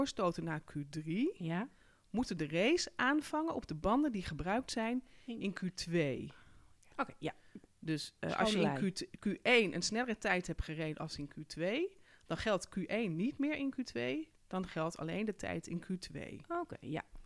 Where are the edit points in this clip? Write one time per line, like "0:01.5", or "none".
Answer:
0:06.9

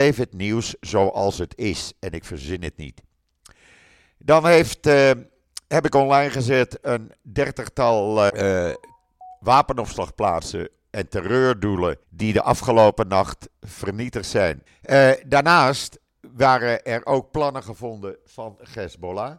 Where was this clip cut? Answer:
0:08.3
0:12.0
0:14.7

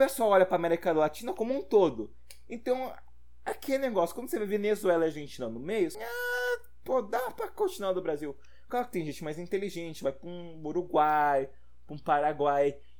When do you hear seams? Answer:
0:05.9

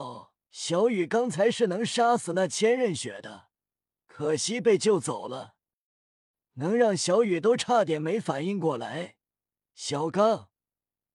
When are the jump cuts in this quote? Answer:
none

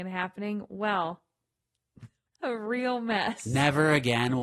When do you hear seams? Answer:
0:02.3

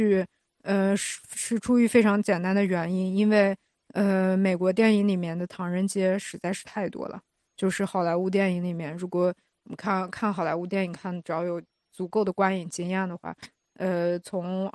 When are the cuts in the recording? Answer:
none

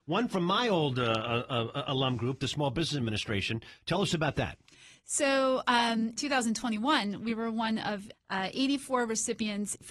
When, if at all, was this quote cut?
none

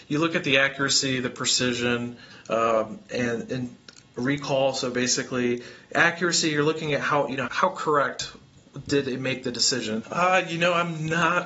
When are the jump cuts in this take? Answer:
0:07.5
0:10.0

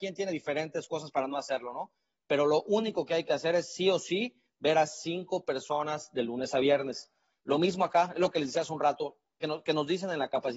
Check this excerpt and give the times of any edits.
0:07.4
0:09.4

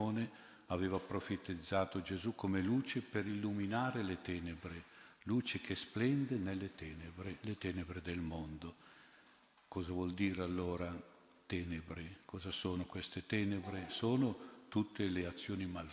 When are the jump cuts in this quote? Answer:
none

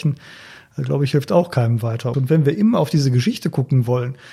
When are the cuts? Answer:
0:02.1

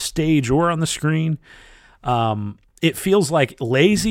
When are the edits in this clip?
none

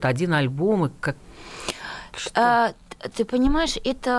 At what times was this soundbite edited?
0:03.1

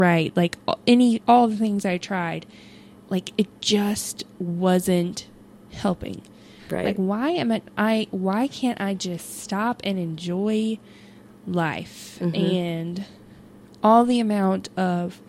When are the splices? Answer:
0:01.2
0:06.6

